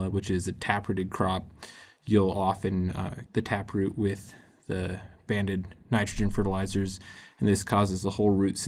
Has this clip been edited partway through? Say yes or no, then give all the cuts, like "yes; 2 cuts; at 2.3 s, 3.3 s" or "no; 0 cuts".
yes; 1 cut; at 3.3 s